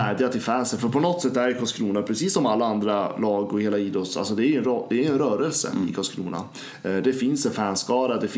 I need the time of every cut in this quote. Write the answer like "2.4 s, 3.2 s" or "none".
none